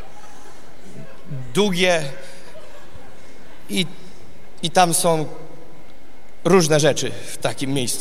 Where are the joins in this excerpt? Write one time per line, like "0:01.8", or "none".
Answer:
none